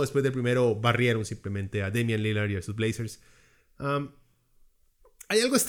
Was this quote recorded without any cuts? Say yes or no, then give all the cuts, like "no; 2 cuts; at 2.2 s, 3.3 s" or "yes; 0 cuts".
yes; 0 cuts